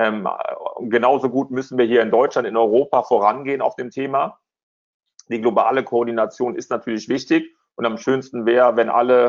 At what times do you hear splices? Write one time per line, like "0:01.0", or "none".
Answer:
none